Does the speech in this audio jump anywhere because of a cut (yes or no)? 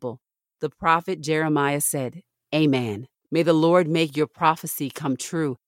yes